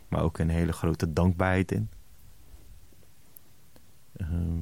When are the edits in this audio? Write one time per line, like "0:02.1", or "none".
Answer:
none